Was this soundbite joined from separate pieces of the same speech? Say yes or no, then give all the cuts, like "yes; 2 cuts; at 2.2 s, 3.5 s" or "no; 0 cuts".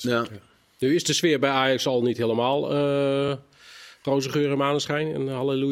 no; 0 cuts